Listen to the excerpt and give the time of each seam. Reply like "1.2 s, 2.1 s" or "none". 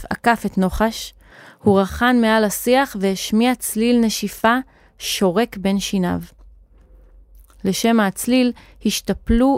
none